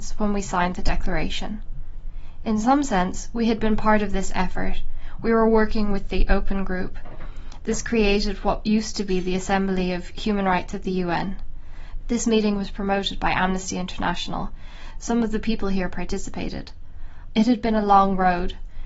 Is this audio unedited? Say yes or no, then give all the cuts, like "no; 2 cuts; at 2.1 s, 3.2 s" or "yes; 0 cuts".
no; 2 cuts; at 12.0 s, 17.3 s